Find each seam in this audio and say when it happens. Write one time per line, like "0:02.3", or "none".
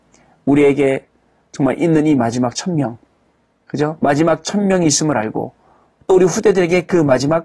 none